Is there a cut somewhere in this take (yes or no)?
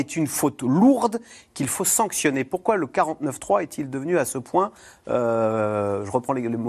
no